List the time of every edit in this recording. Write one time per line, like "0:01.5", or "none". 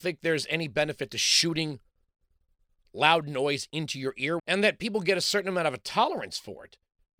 0:04.4